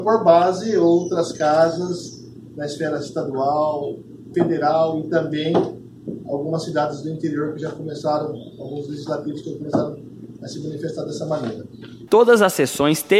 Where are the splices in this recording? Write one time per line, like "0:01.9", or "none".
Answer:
0:04.3
0:12.1